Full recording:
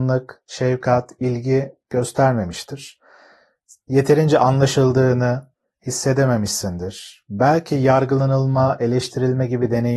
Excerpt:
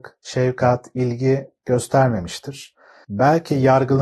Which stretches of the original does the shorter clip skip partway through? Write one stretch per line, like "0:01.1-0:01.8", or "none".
0:03.3-0:07.2